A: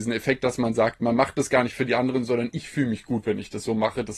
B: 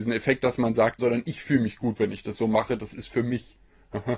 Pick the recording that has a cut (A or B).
B